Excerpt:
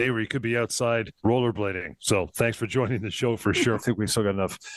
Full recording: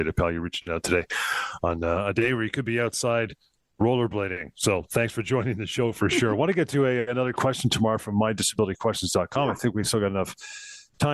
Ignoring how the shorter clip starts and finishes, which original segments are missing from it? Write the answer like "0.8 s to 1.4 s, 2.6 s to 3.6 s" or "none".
3.4 s to 3.7 s, 6.3 s to 9.5 s